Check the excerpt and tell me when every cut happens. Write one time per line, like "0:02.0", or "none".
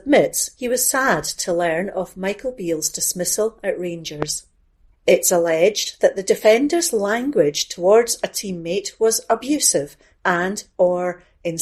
0:04.9